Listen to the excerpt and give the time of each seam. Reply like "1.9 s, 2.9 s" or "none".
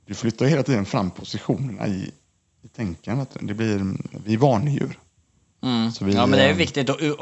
none